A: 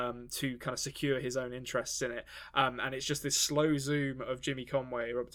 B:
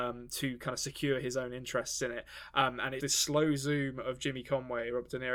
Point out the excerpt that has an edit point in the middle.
B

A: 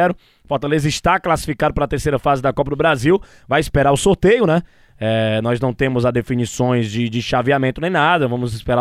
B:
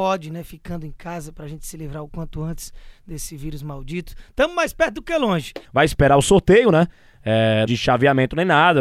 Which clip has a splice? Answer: B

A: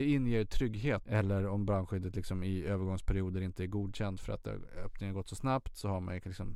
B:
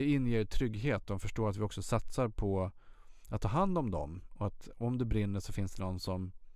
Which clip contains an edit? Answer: A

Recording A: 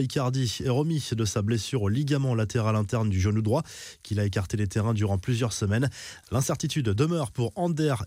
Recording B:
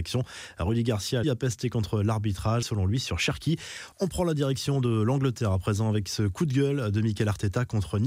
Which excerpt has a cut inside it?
B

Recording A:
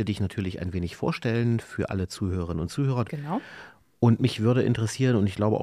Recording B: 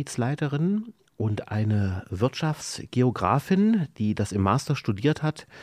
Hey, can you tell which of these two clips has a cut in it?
A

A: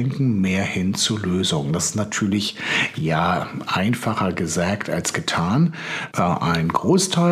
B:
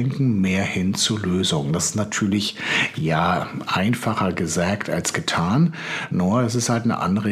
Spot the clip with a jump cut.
A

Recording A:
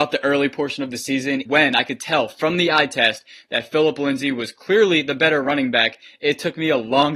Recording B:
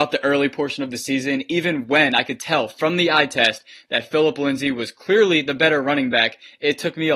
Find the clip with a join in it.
A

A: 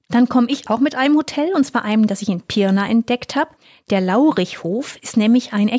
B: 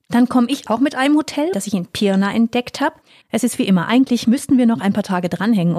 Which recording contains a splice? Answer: B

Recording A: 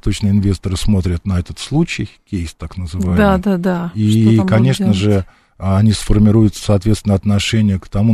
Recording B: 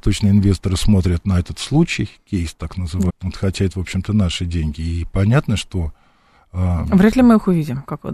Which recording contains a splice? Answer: B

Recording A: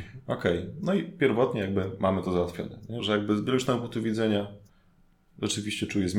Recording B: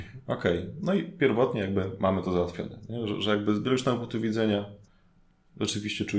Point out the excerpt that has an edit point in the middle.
A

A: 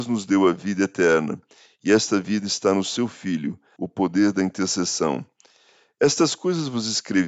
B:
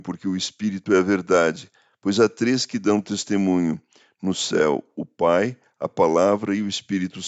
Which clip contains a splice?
A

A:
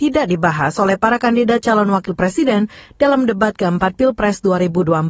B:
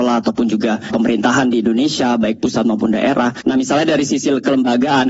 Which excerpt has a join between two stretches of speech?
B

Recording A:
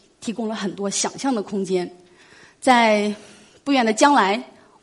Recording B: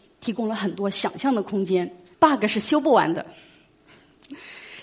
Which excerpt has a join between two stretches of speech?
B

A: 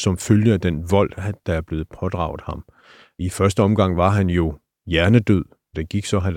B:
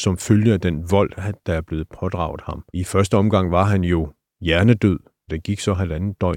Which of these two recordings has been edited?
B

